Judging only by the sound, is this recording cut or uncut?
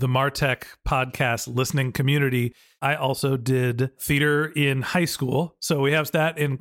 uncut